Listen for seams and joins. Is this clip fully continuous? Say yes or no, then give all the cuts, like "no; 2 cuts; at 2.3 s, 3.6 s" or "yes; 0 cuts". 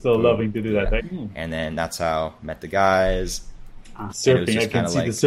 no; 2 cuts; at 1.0 s, 4.1 s